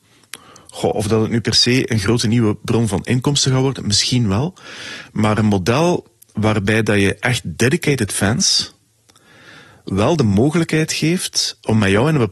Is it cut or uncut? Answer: uncut